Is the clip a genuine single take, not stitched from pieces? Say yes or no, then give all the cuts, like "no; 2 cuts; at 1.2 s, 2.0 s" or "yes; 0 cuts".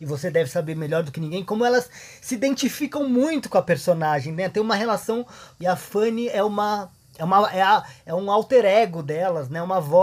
no; 1 cut; at 5.6 s